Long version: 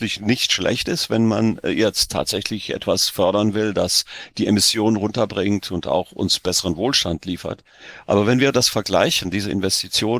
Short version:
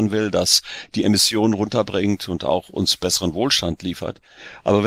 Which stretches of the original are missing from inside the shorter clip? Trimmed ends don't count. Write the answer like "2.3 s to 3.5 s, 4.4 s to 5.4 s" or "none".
none